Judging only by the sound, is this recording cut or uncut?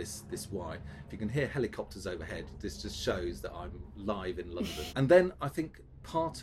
cut